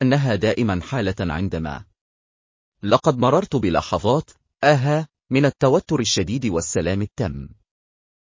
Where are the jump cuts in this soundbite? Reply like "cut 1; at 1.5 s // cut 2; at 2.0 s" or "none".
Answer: none